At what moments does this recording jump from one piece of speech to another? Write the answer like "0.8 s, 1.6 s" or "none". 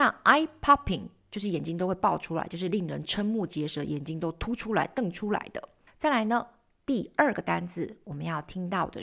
none